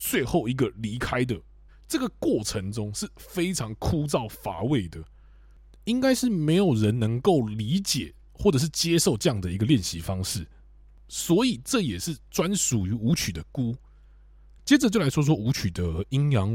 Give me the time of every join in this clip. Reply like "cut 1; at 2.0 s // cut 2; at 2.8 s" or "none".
cut 1; at 1.7 s

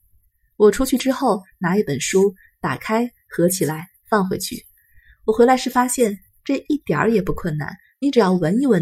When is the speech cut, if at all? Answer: cut 1; at 1.5 s

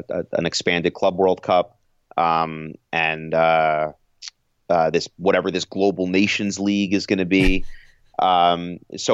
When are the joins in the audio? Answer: none

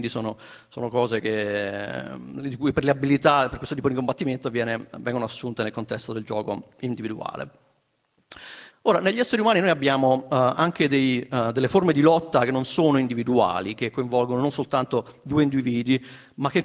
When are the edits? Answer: cut 1; at 8.7 s

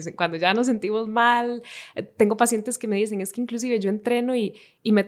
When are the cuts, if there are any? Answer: none

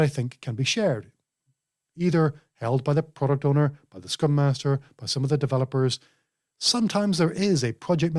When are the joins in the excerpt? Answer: none

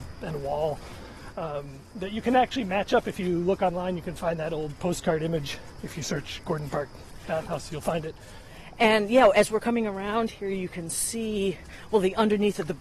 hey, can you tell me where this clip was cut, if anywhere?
none

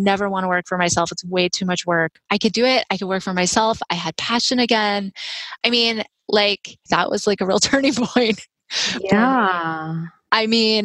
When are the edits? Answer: cut 1; at 2.3 s // cut 2; at 5.6 s // cut 3; at 6.9 s

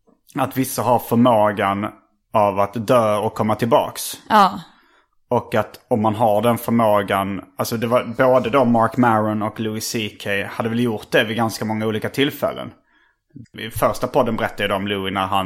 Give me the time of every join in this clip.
cut 1; at 13.4 s

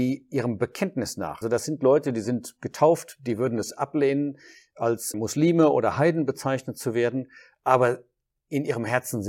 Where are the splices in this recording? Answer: cut 1; at 1.4 s // cut 2; at 5.1 s

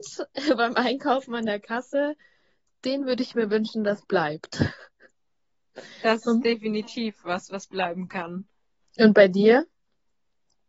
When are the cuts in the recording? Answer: none

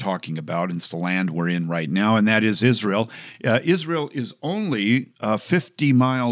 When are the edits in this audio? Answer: none

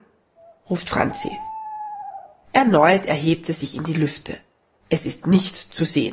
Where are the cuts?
cut 1; at 4.8 s

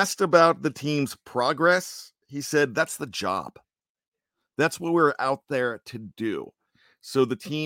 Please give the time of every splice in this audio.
none

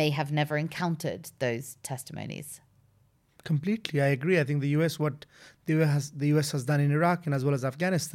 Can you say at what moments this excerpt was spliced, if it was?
none

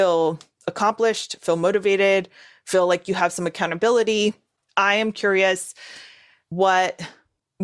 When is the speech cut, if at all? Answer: none

